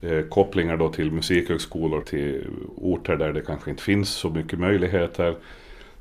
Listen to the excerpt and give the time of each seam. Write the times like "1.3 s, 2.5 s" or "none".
2.0 s

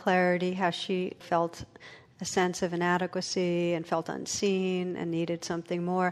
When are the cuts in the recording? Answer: 1.2 s

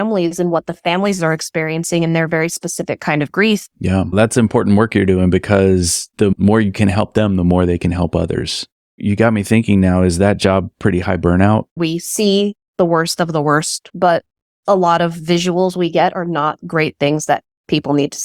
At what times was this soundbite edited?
11.8 s, 13.9 s

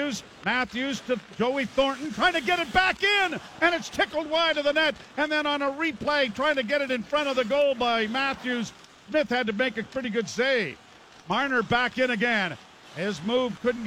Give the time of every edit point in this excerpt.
none

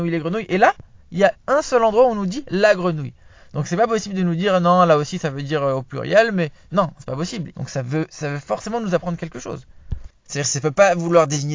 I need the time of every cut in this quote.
7.5 s, 10.3 s

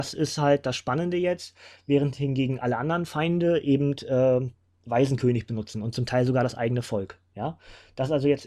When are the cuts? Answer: none

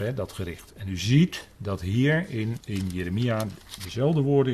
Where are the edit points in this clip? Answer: 2.6 s

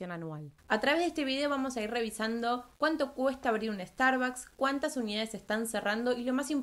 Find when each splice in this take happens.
4.6 s

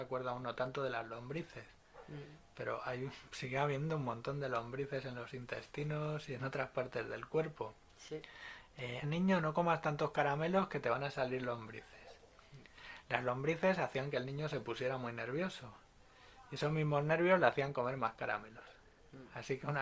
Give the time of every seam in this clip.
9.0 s

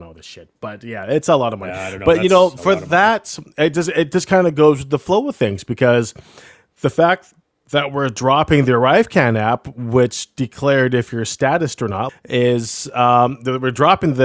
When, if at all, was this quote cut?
12.1 s

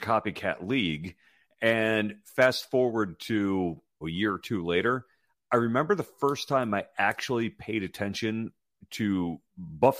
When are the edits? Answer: 4.0 s

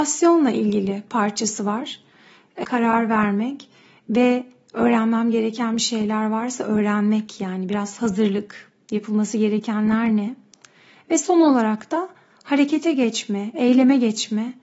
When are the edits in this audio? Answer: 2.6 s

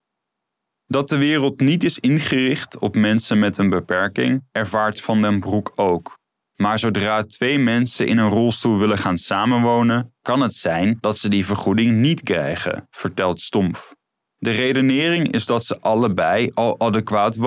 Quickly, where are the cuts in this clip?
6.4 s

